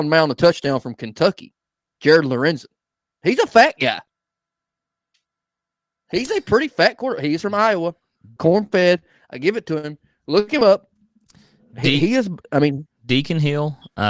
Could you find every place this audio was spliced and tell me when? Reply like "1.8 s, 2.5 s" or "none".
8.4 s